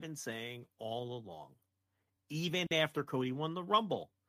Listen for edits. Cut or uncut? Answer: uncut